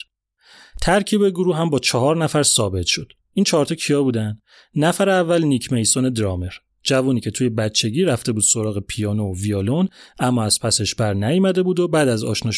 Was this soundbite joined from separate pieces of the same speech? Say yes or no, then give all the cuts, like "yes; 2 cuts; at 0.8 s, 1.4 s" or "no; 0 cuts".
no; 0 cuts